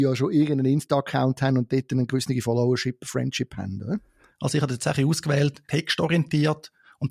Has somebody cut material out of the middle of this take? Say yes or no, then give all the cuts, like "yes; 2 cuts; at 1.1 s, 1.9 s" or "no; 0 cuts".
yes; 2 cuts; at 4.3 s, 5.7 s